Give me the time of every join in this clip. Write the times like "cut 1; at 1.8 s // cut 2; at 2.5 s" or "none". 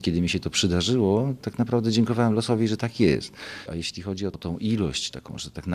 none